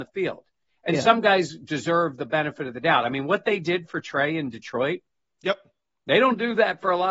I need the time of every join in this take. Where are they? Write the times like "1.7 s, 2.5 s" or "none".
none